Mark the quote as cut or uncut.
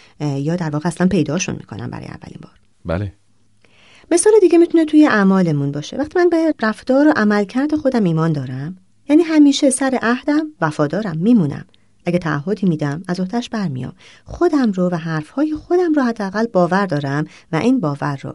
uncut